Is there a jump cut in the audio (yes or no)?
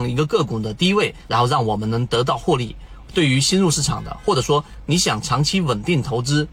yes